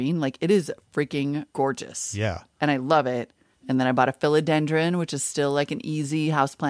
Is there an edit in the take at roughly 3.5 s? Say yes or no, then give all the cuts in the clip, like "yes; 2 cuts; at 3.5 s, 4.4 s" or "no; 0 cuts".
yes; 2 cuts; at 1.5 s, 3.5 s